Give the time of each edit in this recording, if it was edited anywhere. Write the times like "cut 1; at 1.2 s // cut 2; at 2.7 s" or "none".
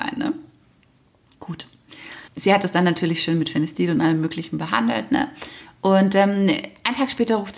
cut 1; at 2.3 s